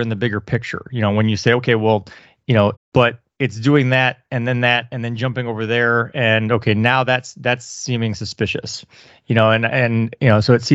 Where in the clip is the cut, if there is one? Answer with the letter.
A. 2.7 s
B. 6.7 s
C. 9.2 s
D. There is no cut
A